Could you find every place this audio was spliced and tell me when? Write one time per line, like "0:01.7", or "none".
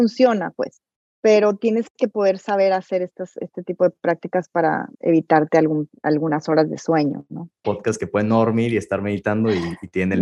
0:04.9
0:07.6